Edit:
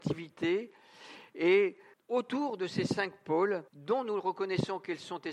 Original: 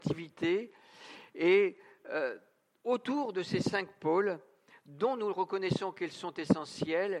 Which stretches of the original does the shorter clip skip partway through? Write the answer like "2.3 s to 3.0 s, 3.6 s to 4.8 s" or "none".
1.9 s to 2.7 s, 4.4 s to 4.8 s